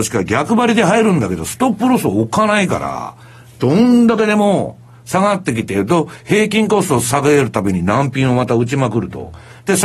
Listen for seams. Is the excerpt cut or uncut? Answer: uncut